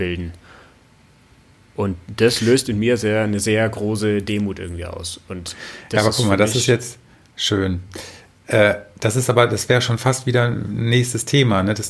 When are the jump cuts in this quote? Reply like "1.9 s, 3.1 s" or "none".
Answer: none